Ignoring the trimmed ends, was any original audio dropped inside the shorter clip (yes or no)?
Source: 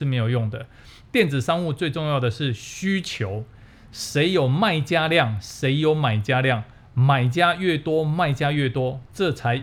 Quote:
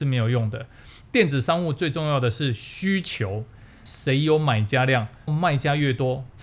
yes